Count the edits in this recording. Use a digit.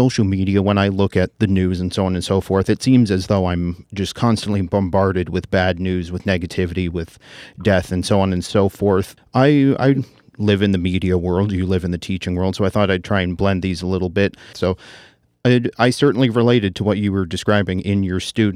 2